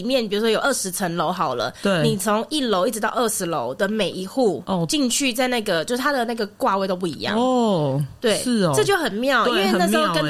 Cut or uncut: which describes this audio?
uncut